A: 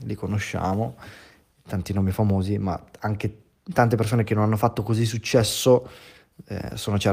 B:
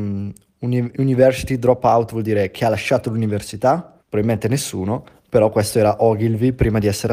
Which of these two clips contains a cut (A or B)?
B